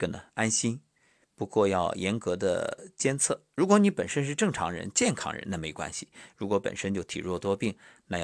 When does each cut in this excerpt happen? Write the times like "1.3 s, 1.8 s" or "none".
none